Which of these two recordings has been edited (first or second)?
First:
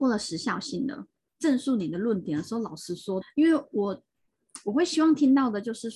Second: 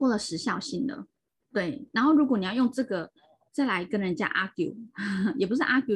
first